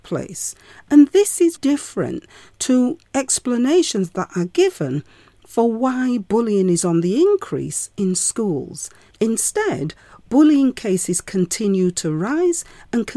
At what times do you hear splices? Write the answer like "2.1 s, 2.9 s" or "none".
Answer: 1.6 s, 9.1 s